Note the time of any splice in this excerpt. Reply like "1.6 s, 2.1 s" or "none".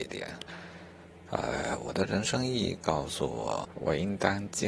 none